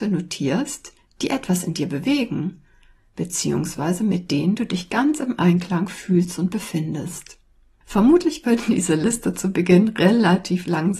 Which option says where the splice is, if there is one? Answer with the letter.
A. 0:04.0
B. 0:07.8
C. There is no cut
C